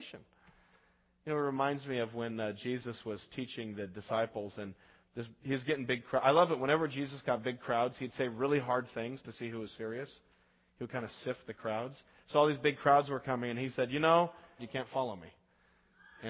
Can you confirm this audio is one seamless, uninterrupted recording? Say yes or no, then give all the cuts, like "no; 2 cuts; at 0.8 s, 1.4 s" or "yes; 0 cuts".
no; 1 cut; at 14.6 s